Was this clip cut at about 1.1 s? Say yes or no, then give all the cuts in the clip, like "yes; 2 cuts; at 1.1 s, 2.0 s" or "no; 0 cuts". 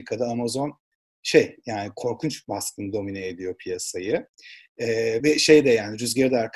no; 1 cut; at 5.2 s